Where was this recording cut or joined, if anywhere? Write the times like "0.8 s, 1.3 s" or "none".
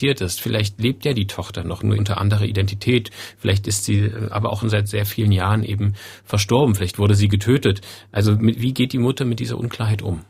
2.0 s, 4.6 s